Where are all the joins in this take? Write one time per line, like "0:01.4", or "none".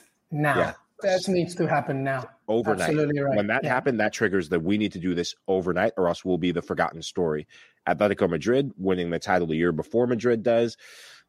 0:01.0